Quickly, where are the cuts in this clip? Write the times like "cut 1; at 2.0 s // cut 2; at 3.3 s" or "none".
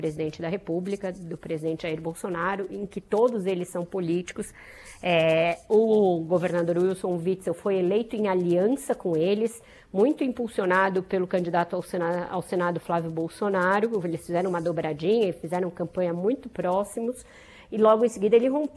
none